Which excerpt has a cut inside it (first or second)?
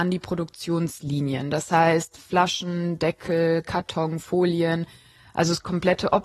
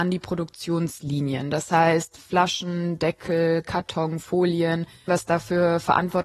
second